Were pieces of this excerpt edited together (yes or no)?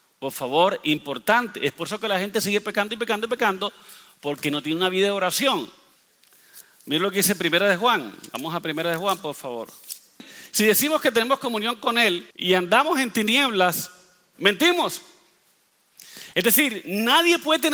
yes